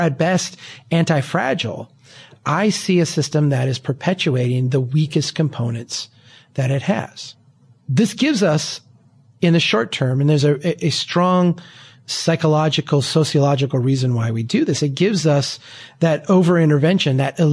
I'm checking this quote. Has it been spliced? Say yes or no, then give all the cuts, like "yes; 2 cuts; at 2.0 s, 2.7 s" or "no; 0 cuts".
no; 0 cuts